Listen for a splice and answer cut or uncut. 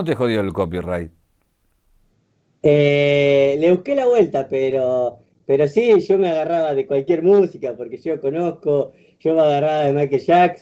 uncut